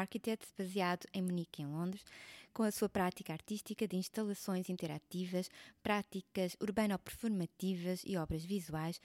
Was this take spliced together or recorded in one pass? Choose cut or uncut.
uncut